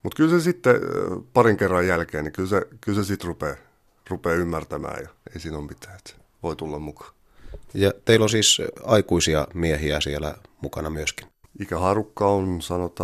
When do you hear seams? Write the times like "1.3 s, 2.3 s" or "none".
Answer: 11.4 s